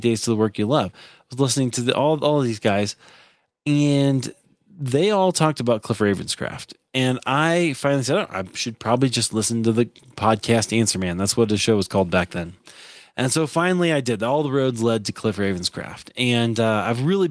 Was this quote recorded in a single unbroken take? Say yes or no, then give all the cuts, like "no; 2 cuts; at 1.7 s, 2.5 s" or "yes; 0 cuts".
yes; 0 cuts